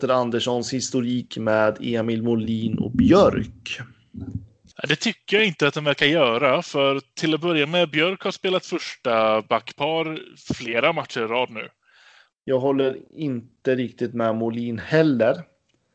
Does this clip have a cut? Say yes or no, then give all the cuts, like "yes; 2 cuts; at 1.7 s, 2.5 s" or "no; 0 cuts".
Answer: yes; 1 cut; at 12.3 s